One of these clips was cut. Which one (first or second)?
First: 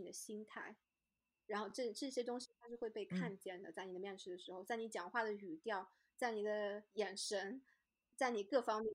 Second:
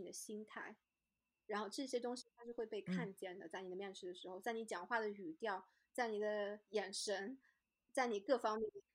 second